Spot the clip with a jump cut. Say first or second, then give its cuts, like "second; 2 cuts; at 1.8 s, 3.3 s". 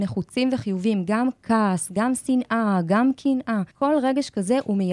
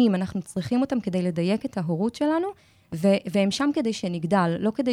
first; 1 cut; at 3.7 s